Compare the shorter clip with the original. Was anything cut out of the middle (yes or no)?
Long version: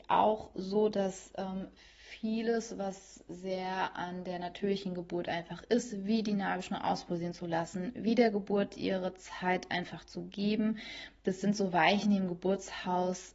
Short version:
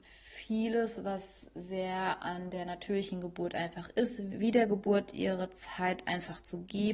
yes